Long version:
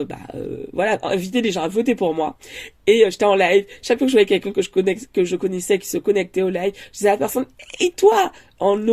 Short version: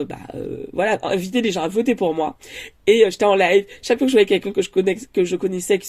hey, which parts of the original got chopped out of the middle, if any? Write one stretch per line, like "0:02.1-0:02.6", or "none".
none